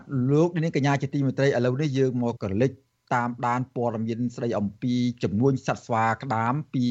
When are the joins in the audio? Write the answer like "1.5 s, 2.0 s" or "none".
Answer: 2.4 s